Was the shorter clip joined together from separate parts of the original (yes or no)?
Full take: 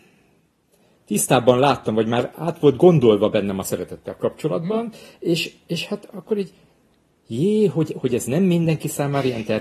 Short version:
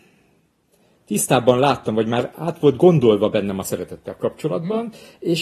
no